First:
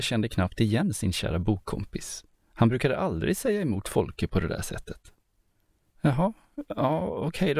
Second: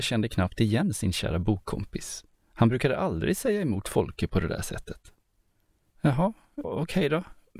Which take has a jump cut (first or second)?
second